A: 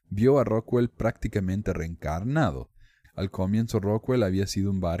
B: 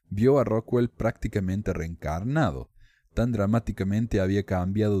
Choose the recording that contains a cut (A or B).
A